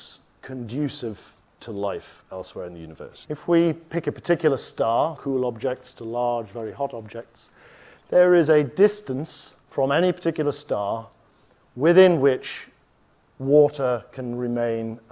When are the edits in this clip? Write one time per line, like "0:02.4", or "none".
0:03.2
0:05.2
0:09.6